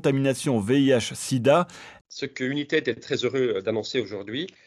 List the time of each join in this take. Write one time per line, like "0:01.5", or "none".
0:02.0